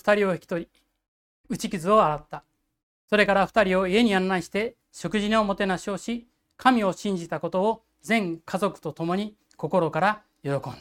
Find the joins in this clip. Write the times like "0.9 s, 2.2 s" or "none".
2.9 s